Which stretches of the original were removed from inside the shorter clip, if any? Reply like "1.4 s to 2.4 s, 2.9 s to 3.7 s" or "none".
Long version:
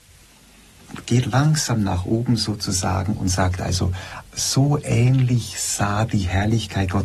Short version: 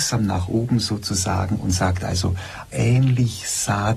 4.3 s to 4.8 s